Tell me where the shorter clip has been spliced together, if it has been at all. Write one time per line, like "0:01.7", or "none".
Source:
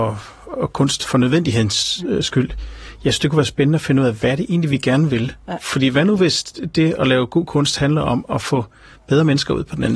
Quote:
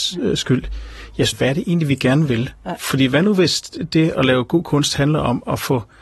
0:01.3